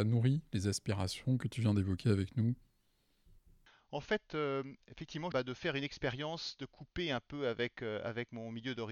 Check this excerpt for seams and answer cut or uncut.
cut